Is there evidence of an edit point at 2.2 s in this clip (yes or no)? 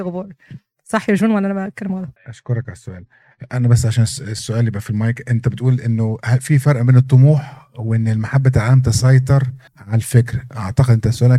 yes